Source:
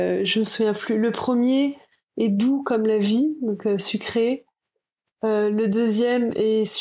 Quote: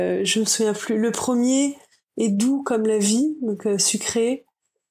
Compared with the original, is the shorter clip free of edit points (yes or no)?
yes